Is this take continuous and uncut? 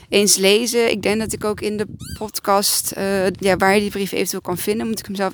no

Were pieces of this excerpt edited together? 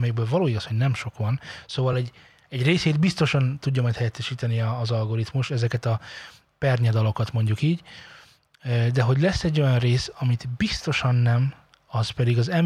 no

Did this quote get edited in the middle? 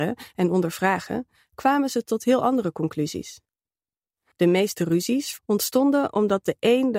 yes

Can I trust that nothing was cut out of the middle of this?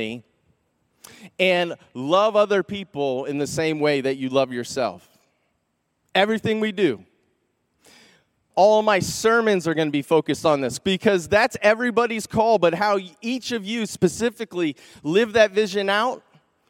no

